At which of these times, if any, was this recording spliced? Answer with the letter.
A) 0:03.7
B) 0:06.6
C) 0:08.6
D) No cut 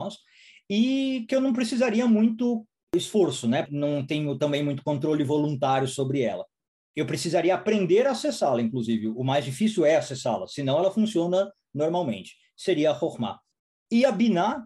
A